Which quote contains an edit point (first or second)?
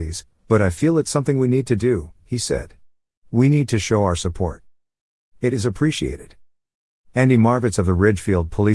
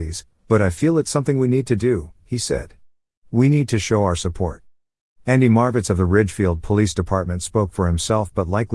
second